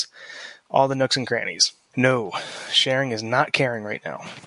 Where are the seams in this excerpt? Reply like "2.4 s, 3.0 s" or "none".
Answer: 1.9 s